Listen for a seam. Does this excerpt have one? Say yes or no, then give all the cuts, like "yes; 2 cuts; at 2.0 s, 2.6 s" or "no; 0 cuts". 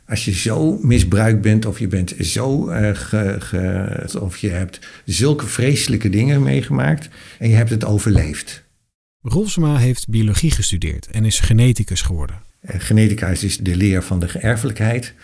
yes; 3 cuts; at 4.1 s, 12.5 s, 13.6 s